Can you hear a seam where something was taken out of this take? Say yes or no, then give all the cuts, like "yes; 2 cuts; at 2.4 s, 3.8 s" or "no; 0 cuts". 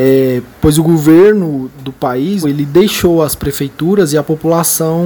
yes; 1 cut; at 2.4 s